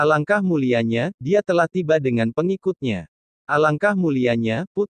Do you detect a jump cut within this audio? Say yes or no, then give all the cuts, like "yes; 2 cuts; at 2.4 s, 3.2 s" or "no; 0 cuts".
yes; 1 cut; at 3.3 s